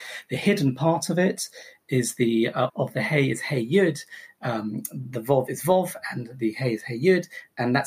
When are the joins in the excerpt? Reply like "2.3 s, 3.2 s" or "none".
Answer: 2.7 s